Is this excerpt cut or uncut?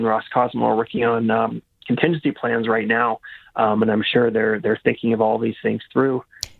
uncut